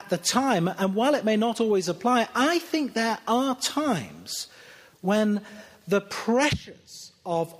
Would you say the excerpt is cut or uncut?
uncut